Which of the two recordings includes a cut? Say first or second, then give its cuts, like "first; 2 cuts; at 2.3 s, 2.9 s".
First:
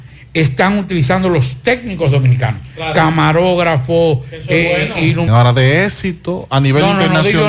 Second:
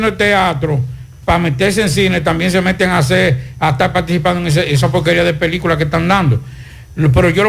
first; 1 cut; at 5.3 s